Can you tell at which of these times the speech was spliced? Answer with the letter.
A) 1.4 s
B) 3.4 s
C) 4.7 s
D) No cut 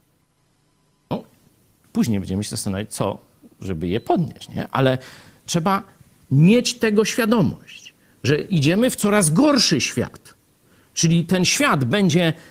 D